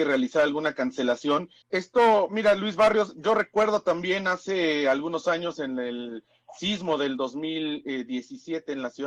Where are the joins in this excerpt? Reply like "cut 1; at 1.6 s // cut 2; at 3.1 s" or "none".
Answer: cut 1; at 1.6 s